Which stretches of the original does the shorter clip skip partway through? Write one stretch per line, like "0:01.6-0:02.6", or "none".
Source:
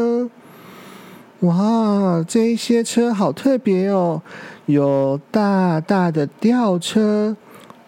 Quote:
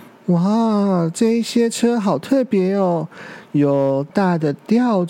0:05.2-0:05.8